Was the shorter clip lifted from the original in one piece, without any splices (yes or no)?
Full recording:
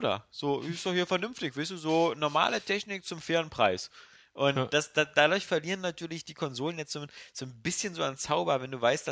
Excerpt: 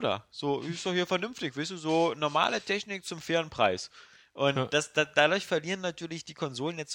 yes